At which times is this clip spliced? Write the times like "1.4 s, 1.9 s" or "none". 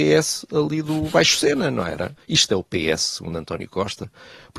2.2 s